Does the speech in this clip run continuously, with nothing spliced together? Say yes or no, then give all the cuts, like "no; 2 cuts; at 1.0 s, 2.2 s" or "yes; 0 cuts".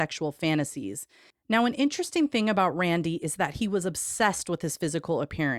no; 1 cut; at 1.3 s